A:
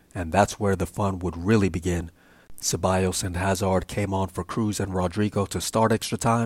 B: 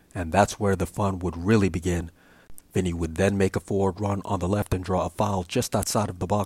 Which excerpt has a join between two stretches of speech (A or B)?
B